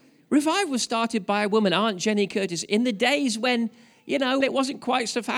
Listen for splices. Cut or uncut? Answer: cut